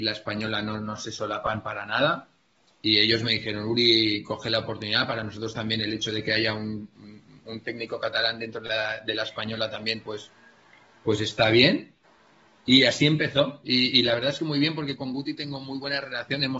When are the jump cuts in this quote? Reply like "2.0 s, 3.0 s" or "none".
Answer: none

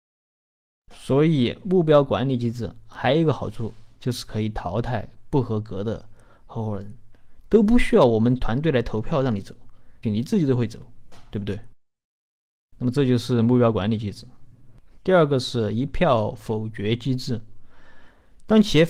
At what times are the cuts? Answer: 10.0 s

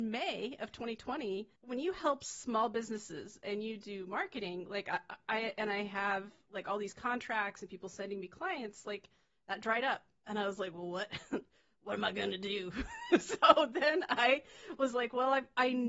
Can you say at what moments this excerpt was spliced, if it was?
1.6 s

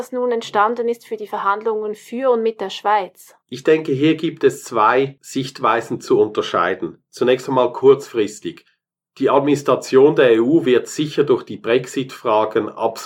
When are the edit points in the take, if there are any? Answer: 3.4 s

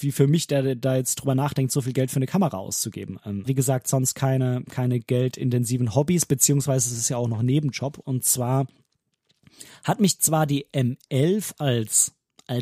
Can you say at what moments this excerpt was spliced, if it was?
3.5 s, 8.0 s

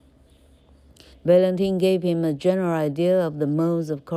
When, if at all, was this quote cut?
1.1 s

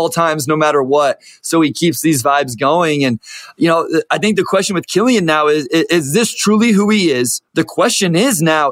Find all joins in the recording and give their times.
7.5 s

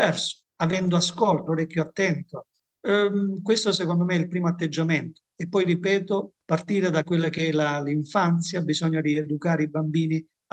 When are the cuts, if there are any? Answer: 1.5 s

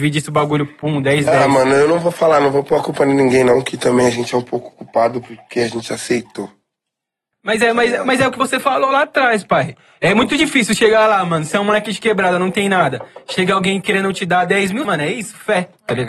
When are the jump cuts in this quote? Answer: 14.8 s

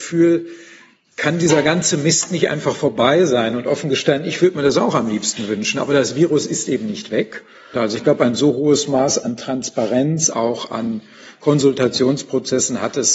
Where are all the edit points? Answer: 7.7 s, 10.3 s

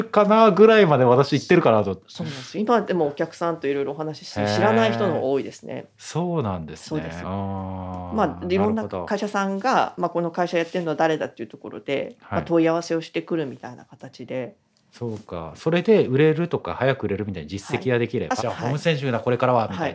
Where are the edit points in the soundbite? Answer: 7.2 s, 18.4 s

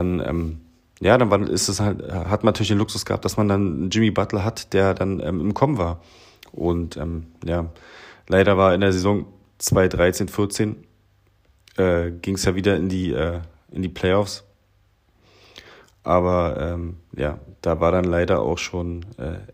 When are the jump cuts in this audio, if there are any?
none

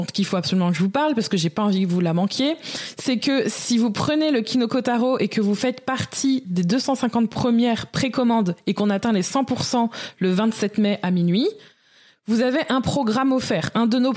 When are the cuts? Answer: none

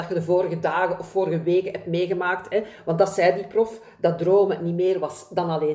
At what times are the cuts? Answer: none

